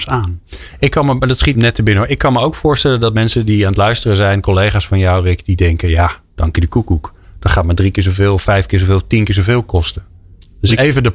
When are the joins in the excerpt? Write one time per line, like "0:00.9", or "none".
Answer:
0:01.5